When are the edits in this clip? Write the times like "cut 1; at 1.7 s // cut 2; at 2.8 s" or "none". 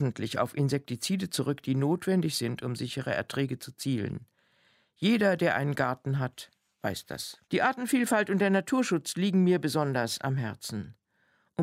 cut 1; at 7.4 s